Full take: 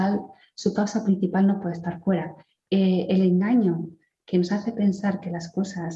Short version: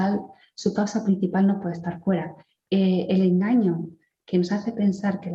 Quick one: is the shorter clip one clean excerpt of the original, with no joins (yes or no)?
yes